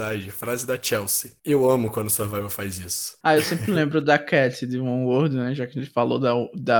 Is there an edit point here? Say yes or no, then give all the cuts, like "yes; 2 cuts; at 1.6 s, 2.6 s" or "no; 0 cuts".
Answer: no; 0 cuts